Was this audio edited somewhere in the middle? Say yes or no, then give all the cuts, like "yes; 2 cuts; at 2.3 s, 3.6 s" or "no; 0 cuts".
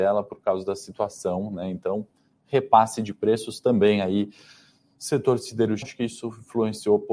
yes; 1 cut; at 5.8 s